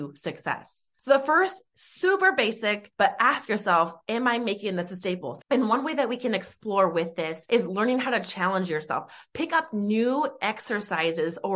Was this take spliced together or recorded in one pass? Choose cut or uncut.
cut